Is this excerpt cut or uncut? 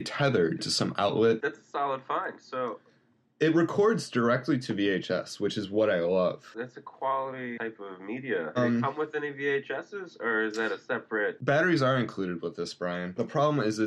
cut